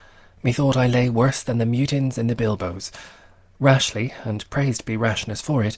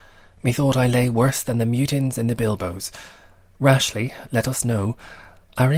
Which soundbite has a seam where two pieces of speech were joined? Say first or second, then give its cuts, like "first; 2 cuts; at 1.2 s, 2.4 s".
second; 1 cut; at 4.2 s